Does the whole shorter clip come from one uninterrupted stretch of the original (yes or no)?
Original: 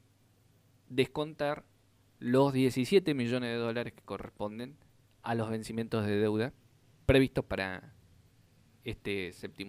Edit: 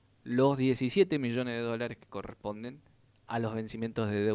yes